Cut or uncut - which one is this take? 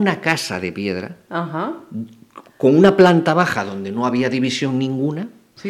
uncut